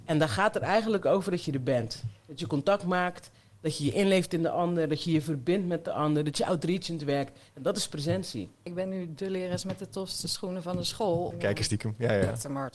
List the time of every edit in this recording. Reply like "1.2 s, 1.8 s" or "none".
8.7 s, 11.3 s